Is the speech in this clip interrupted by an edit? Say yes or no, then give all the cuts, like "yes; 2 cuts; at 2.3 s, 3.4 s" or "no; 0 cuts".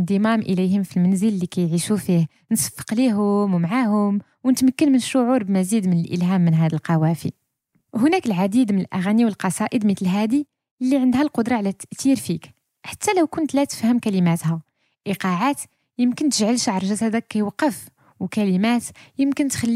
no; 0 cuts